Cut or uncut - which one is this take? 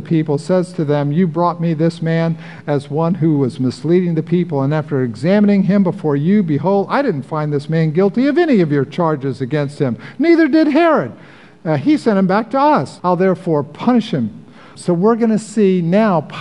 cut